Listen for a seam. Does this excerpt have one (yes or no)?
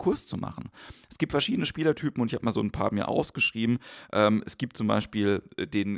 no